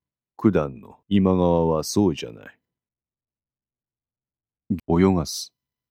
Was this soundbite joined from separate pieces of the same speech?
yes; 2 cuts; at 1.0 s, 4.8 s

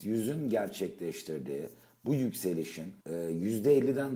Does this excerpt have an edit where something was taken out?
yes; 1 cut; at 3.0 s

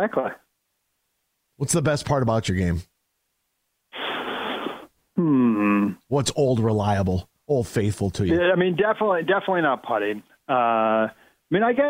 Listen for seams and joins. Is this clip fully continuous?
yes; 0 cuts

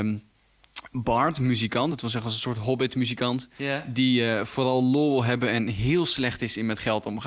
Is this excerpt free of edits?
yes; 0 cuts

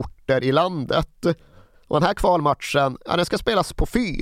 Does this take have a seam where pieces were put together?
no; 0 cuts

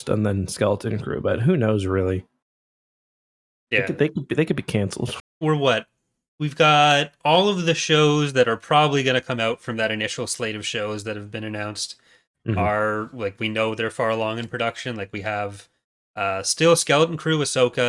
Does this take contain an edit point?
yes; 1 cut; at 5.2 s

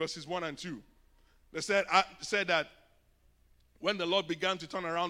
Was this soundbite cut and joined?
no; 0 cuts

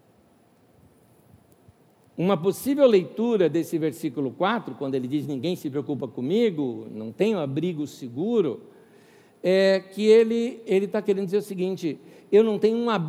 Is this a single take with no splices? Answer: yes; 0 cuts

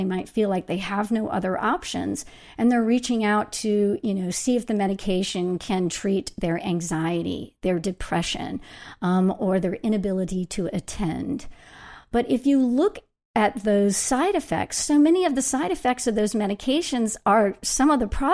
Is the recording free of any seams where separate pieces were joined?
yes; 0 cuts

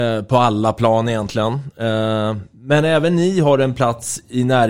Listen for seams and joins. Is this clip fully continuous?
yes; 0 cuts

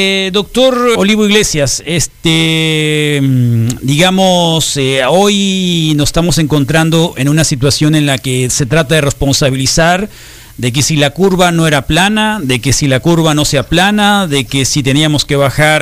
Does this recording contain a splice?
yes; 1 cut; at 0.9 s

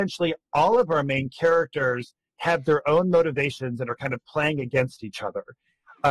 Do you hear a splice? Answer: no; 0 cuts

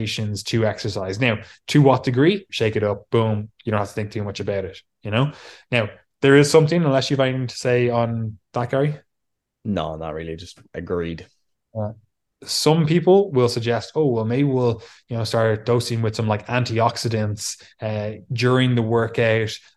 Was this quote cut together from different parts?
yes; 2 cuts; at 2.5 s, 5.6 s

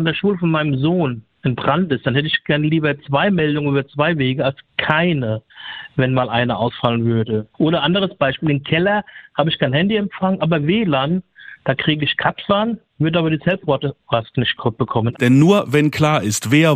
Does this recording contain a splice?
yes; 1 cut; at 15.1 s

